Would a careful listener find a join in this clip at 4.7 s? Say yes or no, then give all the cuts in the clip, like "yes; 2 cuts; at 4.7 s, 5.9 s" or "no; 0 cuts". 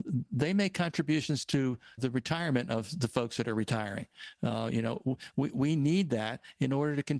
no; 1 cut; at 2.0 s